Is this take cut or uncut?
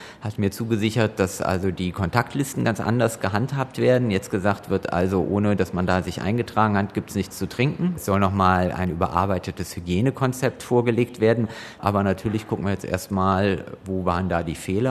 uncut